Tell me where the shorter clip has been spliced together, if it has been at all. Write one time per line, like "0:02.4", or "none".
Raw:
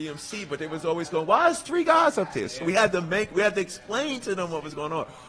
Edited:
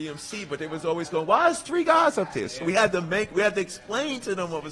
none